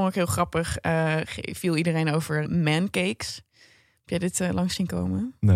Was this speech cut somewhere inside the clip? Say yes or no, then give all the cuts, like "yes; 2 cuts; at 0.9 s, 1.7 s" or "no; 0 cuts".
yes; 1 cut; at 2.4 s